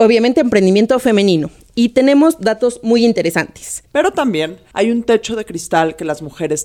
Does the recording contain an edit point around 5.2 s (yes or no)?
no